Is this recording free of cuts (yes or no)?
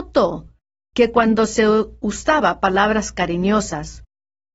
yes